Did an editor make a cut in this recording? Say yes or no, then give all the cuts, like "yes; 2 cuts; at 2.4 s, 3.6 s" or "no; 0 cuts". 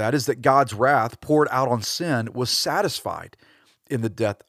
no; 0 cuts